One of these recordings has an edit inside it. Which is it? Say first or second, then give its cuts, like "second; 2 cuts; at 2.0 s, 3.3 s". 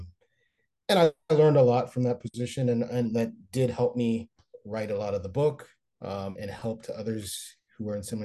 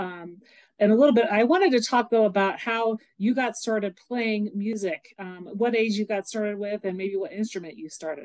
first; 1 cut; at 6.4 s